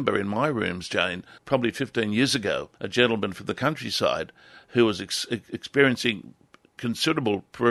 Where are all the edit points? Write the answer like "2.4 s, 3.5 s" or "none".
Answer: 1.4 s, 2.7 s